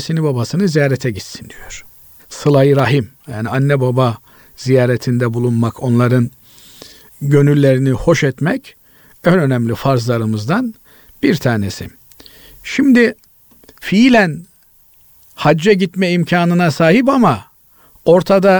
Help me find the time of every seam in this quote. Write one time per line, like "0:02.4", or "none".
0:02.2